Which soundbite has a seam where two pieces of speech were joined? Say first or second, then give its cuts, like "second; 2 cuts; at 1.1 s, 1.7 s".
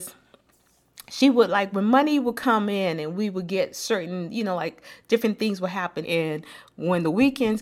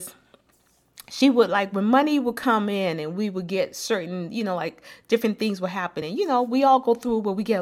first; 1 cut; at 6.0 s